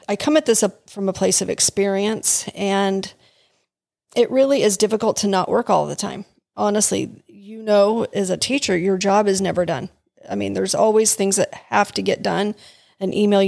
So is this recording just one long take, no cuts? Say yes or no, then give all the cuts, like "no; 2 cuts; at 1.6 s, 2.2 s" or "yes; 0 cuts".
no; 1 cut; at 8.1 s